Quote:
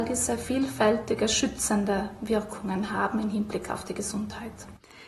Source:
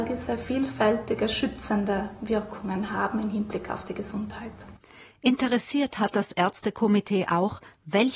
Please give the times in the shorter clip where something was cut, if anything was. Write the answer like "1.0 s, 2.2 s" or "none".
none